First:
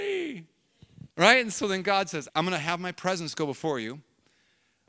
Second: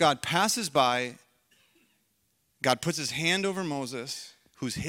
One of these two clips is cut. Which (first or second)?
first